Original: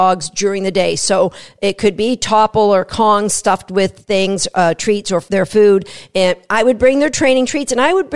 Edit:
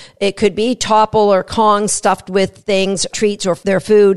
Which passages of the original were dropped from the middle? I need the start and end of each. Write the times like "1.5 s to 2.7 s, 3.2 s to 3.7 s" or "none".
4.5 s to 4.8 s